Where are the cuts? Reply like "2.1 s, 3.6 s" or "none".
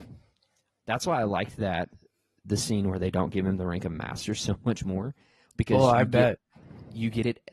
none